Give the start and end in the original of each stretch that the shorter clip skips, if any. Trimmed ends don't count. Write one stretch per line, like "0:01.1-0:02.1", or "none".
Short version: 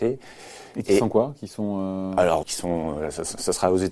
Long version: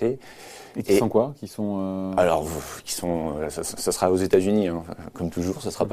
0:02.4-0:02.8